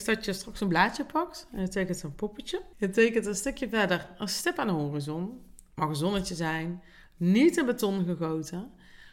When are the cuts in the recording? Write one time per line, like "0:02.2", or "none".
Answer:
0:02.7